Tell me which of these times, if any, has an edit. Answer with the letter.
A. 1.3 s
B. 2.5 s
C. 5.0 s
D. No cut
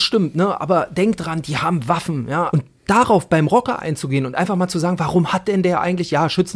B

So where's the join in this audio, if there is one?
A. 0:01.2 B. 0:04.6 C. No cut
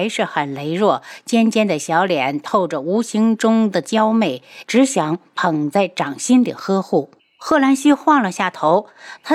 B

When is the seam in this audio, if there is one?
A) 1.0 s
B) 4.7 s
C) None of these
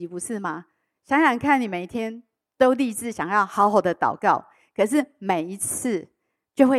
A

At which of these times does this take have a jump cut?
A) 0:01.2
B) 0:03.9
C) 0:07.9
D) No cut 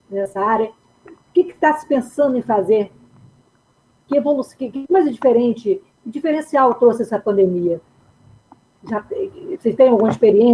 A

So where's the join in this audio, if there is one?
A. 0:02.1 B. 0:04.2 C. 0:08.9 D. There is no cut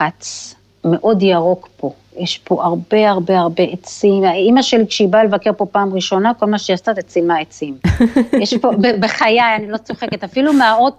D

